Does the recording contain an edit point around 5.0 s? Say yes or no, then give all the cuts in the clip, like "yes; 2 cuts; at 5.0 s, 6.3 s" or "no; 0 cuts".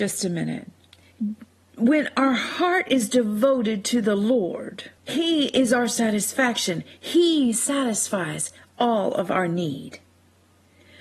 yes; 1 cut; at 5.0 s